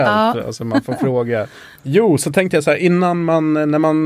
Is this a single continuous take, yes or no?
no